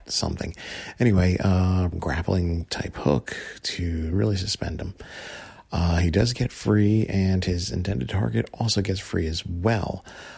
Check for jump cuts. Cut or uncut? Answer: cut